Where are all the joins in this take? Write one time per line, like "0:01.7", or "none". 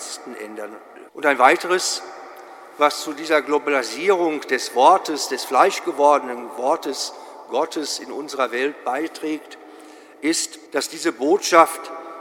0:01.1
0:10.7